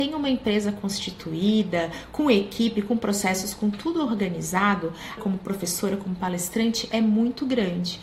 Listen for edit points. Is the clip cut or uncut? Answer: cut